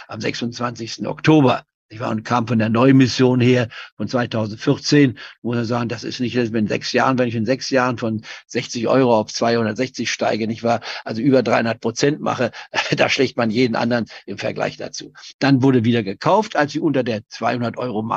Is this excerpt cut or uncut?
uncut